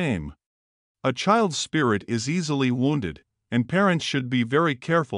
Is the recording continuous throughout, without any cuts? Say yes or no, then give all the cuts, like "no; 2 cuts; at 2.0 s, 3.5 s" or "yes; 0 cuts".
no; 1 cut; at 0.9 s